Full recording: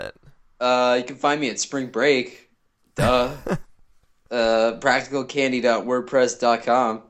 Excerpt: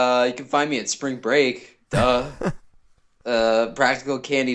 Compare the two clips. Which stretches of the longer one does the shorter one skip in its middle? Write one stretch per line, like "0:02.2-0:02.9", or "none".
0:02.6-0:02.9

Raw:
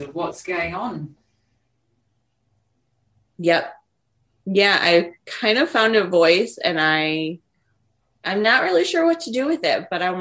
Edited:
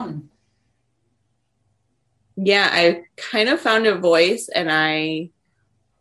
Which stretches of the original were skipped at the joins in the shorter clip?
0:03.2-0:04.4

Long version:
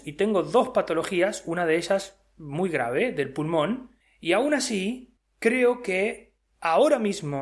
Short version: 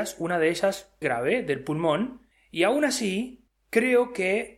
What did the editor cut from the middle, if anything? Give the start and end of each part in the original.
0:02.3-0:02.7

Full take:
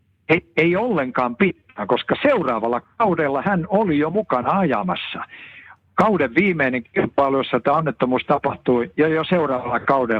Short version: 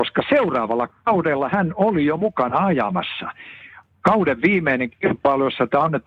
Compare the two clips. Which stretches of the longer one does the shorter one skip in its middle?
none

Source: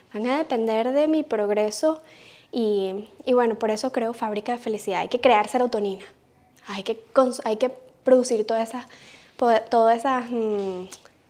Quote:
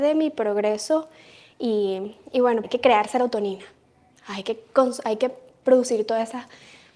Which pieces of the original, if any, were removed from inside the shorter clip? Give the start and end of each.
0:03.6-0:05.0

